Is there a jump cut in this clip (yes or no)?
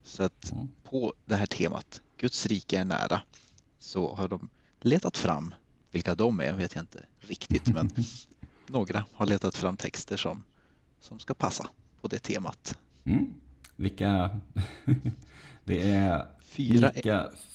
yes